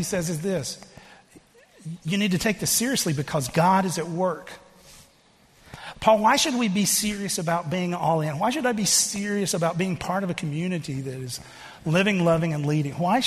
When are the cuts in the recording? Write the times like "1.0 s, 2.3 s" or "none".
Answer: 5.9 s